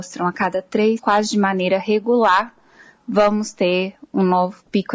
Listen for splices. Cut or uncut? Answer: cut